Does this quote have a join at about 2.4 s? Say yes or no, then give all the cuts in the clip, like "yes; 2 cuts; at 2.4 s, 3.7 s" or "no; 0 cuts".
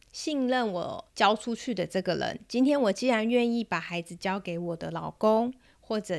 no; 1 cut; at 1.1 s